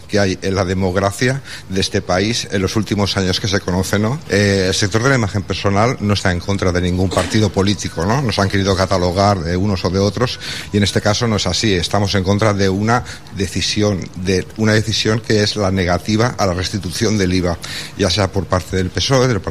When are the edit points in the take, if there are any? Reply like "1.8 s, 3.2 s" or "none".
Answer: 4.3 s